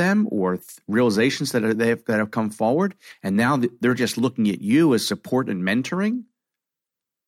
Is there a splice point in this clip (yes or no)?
no